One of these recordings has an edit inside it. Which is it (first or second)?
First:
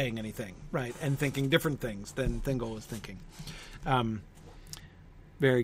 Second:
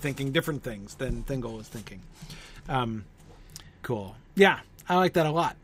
second